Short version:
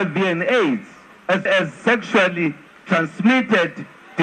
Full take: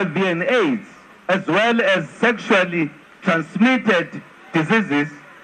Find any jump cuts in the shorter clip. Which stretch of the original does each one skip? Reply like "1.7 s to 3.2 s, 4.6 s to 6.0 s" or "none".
1.5 s to 1.8 s